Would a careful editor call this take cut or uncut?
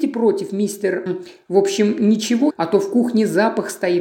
cut